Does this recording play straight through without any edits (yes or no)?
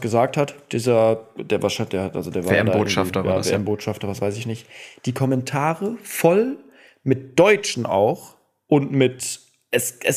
yes